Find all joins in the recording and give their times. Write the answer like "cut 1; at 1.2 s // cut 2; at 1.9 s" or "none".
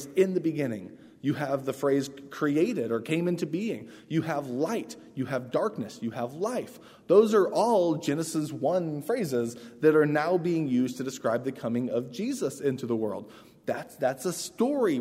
none